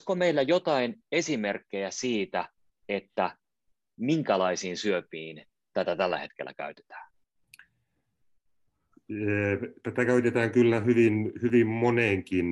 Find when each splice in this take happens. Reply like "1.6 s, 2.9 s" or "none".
none

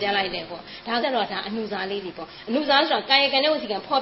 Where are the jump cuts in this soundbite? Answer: 1.0 s

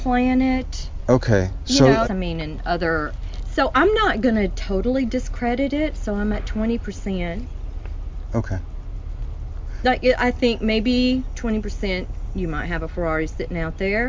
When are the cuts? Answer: 2.0 s

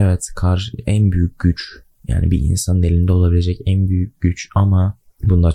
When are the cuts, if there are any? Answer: none

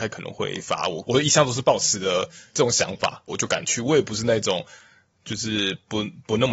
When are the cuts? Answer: 1.0 s, 3.3 s

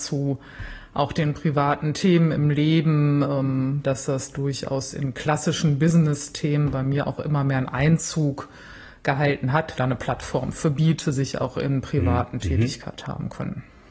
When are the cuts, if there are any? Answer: 3.8 s, 9.8 s, 12.4 s

